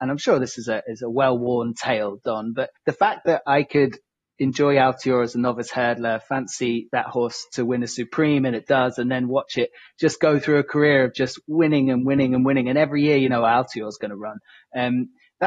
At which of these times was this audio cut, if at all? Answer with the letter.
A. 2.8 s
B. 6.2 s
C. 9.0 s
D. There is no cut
A